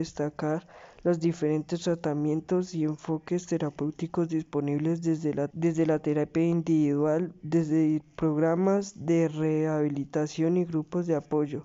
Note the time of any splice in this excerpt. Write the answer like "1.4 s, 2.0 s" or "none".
5.5 s